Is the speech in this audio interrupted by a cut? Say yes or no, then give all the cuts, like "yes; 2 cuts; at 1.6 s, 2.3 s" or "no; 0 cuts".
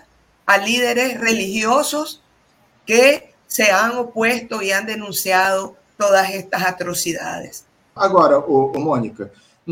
yes; 1 cut; at 8.0 s